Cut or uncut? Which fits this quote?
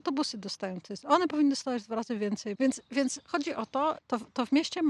cut